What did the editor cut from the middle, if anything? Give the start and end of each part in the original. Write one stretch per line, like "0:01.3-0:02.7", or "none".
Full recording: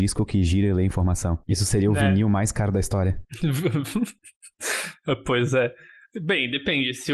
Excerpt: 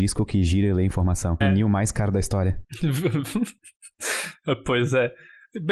0:01.4-0:02.0